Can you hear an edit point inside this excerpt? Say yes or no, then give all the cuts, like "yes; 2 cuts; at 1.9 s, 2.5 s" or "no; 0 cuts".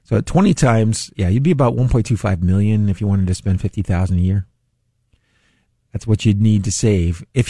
yes; 1 cut; at 1.1 s